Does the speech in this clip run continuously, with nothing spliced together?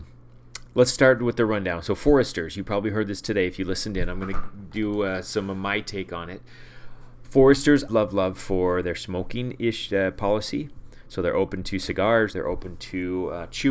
no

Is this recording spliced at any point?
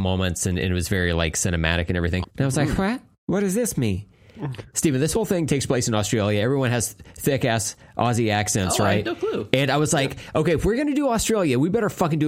yes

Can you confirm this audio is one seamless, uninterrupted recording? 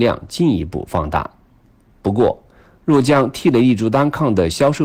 yes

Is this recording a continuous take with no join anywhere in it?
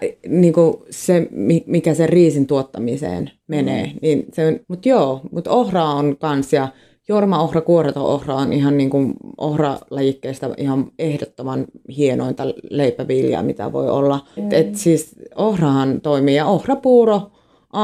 no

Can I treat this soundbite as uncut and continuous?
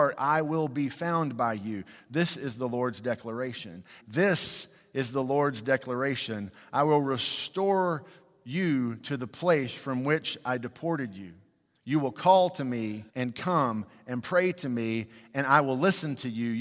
no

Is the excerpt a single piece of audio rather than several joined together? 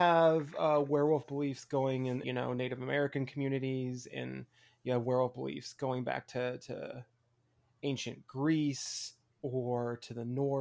no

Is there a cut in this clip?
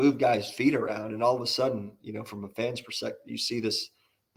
no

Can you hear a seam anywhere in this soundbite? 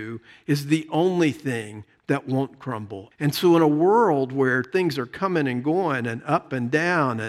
yes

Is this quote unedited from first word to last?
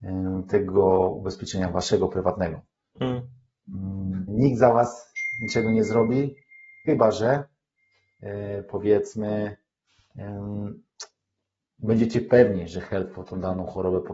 no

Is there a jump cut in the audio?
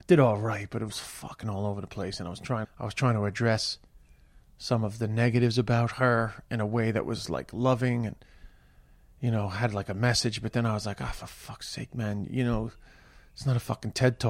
yes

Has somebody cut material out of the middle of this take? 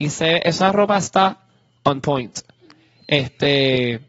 no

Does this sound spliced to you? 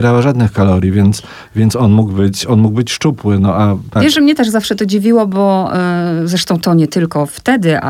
yes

